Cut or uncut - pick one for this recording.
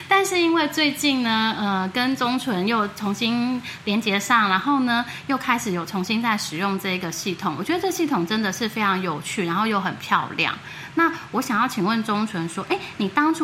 uncut